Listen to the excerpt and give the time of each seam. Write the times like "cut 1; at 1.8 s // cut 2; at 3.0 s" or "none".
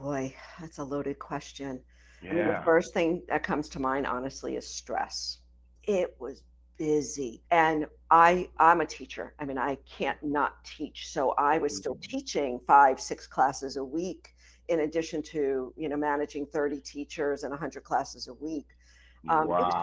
cut 1; at 5.8 s // cut 2; at 7.5 s